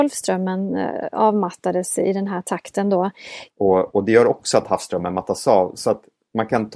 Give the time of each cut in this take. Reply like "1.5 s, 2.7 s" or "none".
3.5 s